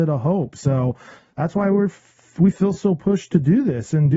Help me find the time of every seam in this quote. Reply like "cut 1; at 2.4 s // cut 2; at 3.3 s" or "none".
none